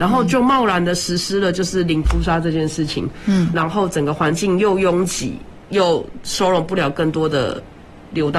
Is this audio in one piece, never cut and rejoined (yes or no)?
no